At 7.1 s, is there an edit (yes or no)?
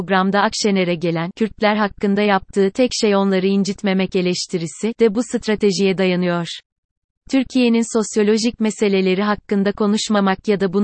no